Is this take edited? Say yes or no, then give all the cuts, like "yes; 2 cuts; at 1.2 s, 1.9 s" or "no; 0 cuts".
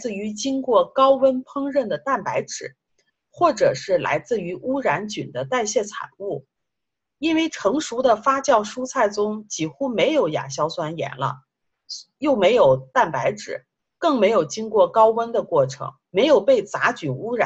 yes; 1 cut; at 16.0 s